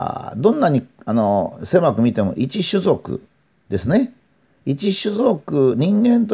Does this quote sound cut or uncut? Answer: uncut